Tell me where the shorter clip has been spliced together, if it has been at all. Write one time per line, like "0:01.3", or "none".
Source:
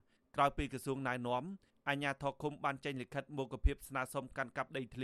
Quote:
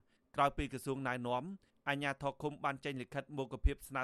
none